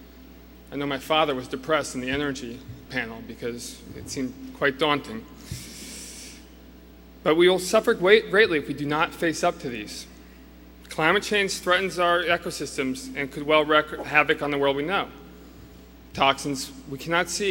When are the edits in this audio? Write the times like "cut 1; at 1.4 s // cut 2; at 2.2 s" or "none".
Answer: cut 1; at 2.9 s